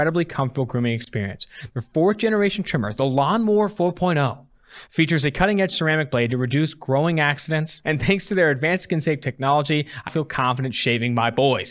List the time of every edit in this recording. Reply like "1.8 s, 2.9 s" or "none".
7.8 s, 10.1 s